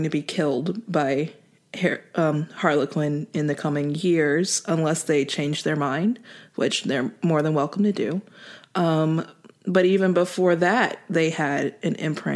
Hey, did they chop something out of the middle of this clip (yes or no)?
no